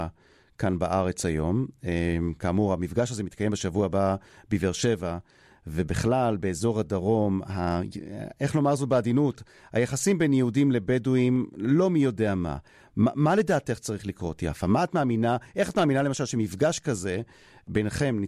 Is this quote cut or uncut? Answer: uncut